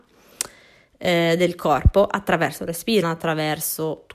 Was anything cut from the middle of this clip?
yes; 1 cut; at 3.0 s

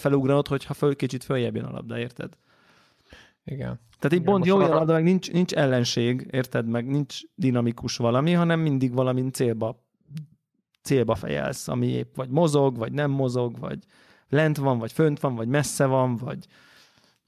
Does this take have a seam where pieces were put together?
no; 0 cuts

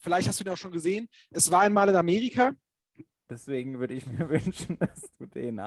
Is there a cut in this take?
yes; 1 cut; at 3.3 s

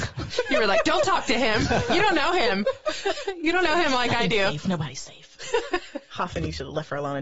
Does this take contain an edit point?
no; 0 cuts

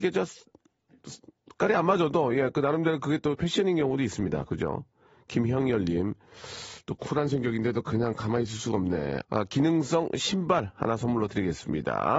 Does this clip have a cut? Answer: yes; 1 cut; at 9.2 s

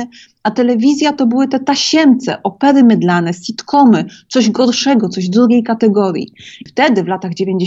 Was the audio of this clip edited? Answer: yes; 1 cut; at 6.7 s

